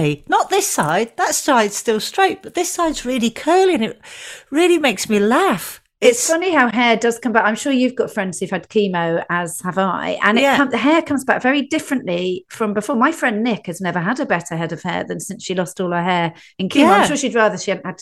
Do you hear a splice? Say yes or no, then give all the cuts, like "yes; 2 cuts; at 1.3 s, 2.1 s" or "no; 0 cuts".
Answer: no; 0 cuts